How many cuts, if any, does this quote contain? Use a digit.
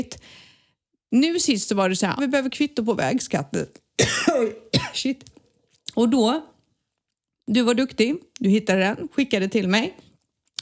1